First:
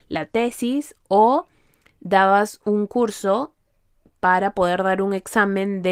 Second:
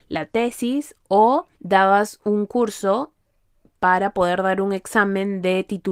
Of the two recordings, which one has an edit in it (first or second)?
second